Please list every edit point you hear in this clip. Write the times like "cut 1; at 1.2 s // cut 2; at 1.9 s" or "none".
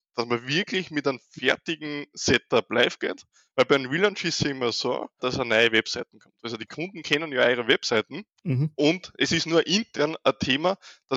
cut 1; at 5.2 s // cut 2; at 8.3 s